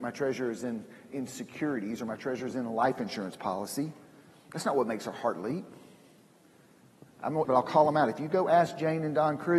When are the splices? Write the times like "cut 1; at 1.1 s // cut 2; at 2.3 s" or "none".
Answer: cut 1; at 1.1 s // cut 2; at 7.4 s